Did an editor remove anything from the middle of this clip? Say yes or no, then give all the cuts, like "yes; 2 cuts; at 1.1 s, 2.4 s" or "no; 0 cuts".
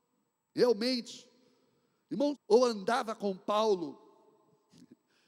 yes; 1 cut; at 2.3 s